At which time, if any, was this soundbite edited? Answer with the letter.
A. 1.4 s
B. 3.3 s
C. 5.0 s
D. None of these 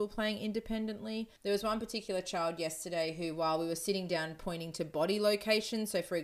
A